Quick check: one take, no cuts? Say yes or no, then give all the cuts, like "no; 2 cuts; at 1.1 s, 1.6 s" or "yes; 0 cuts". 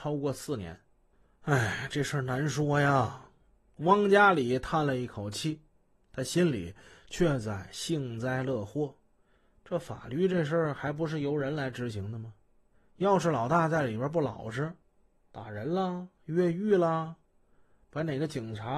yes; 0 cuts